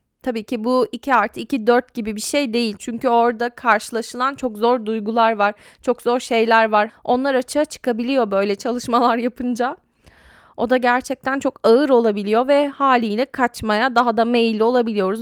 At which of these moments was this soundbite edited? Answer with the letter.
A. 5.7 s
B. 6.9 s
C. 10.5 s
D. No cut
B